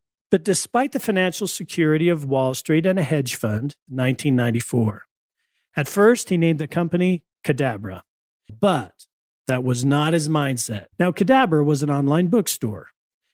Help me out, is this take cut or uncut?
cut